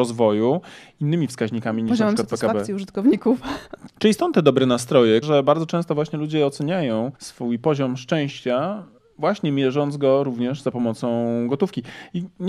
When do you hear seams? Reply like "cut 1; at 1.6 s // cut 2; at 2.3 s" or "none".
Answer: cut 1; at 3.9 s // cut 2; at 5.2 s // cut 3; at 7.1 s